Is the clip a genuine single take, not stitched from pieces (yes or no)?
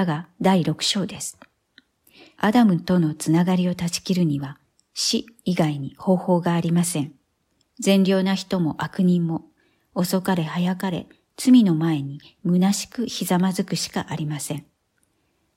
no